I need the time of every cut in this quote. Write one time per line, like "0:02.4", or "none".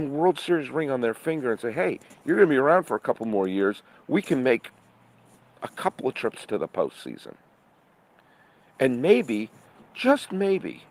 none